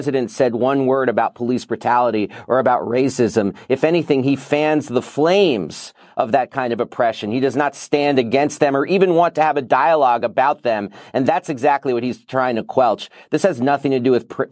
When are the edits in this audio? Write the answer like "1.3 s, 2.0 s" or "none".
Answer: none